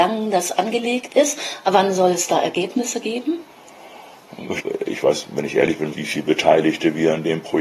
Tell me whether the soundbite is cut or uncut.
cut